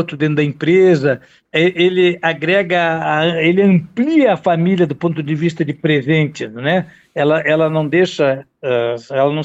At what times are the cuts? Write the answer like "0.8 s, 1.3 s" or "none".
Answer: none